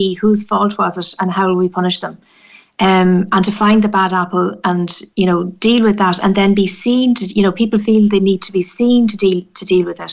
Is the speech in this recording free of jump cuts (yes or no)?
yes